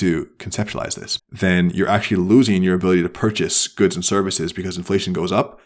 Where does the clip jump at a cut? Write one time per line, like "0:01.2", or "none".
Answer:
0:01.2